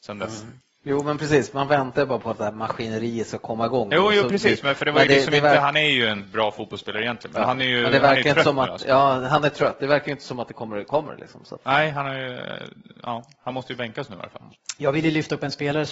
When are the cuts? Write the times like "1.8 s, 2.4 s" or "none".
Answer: none